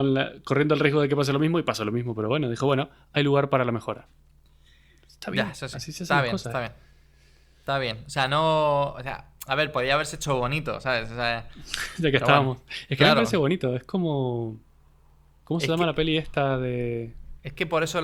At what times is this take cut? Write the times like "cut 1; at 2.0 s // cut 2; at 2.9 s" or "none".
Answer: none

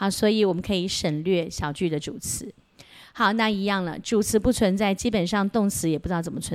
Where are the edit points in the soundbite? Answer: none

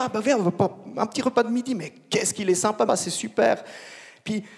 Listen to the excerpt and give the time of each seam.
cut 1; at 2.9 s

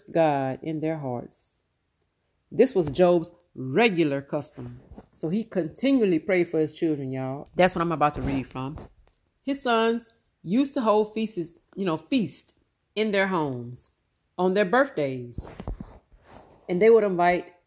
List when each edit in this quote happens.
cut 1; at 7.5 s

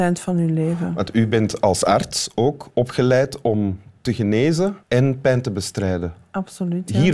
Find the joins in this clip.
cut 1; at 4.8 s

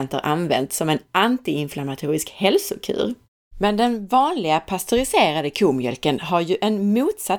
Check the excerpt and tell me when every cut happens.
cut 1; at 3.5 s

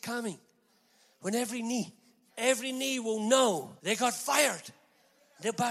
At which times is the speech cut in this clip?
cut 1; at 2.3 s // cut 2; at 3.8 s

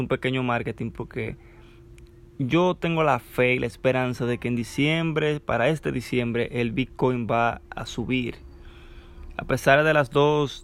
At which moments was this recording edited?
none

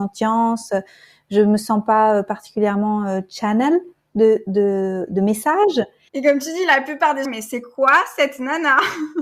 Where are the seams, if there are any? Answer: cut 1; at 6.1 s // cut 2; at 7.2 s

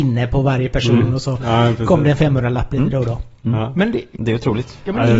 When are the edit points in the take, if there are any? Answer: none

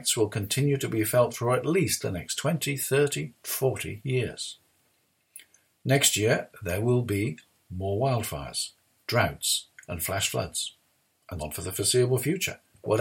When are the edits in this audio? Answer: cut 1; at 11.4 s

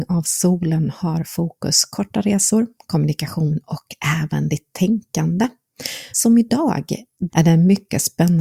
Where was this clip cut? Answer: cut 1; at 6.1 s // cut 2; at 7.3 s

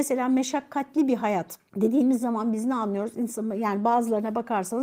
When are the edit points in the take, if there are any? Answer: cut 1; at 1.7 s

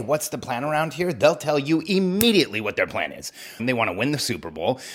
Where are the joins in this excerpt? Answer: cut 1; at 3.6 s

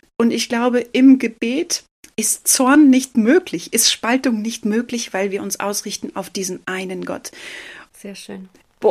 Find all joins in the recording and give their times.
cut 1; at 7.9 s

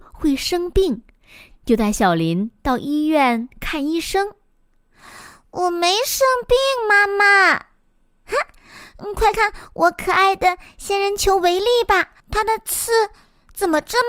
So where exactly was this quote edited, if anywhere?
cut 1; at 9.3 s // cut 2; at 12.2 s

